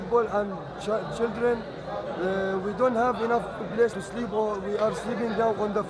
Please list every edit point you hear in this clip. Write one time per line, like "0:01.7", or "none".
0:03.9